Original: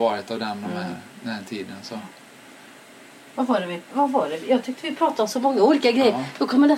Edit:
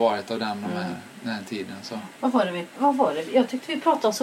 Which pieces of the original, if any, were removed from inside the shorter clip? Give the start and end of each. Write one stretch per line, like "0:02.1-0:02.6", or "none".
0:02.1-0:03.3

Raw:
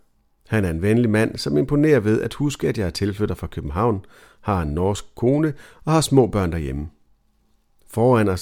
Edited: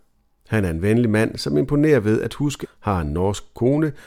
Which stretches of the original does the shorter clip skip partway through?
0:02.6-0:04.2

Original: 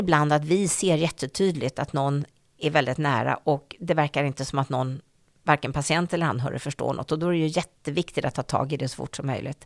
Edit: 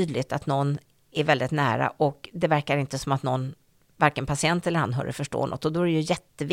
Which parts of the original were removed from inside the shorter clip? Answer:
none

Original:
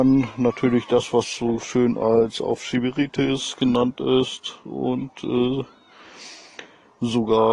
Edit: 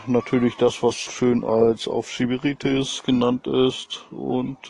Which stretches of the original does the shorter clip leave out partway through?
0:01.4-0:01.6

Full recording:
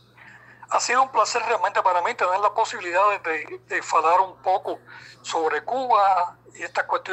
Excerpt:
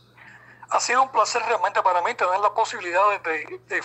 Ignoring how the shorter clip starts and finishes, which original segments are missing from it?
none

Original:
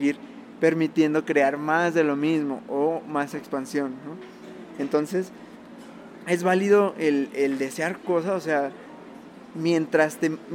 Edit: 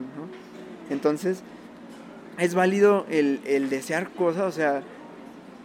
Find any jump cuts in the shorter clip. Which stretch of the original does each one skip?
none

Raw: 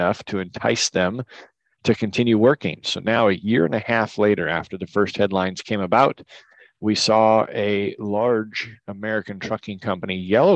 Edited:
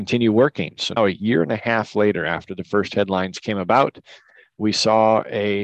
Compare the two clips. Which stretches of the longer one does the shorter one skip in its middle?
0:03.0-0:03.2

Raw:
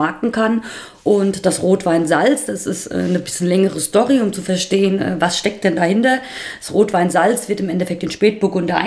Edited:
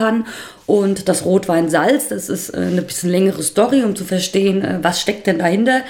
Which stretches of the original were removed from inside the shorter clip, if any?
none

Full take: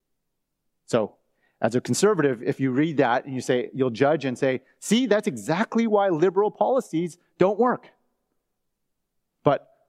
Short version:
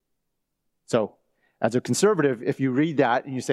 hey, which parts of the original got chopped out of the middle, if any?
none

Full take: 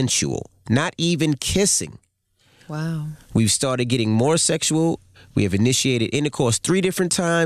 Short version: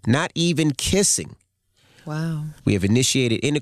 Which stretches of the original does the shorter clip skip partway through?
0:03.2-0:05.3

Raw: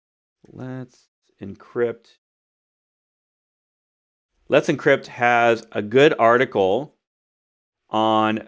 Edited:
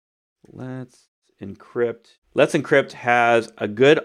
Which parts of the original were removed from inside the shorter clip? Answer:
0:02.2-0:04.4

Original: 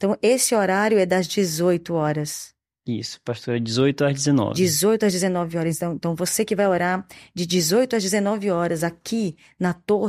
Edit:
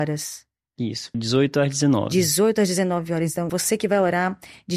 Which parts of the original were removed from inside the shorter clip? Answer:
0:03.2-0:03.6
0:05.9-0:06.2

